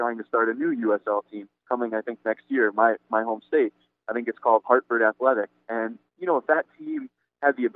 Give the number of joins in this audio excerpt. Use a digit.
1